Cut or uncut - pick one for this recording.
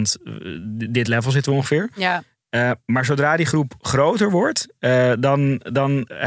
uncut